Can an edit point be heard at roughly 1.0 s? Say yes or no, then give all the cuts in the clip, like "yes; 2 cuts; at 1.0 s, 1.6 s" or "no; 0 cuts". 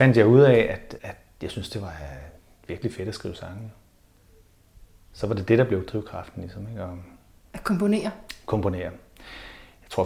yes; 1 cut; at 1.0 s